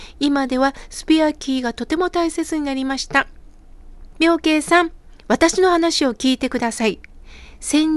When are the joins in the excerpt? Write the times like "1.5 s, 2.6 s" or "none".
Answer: 4.2 s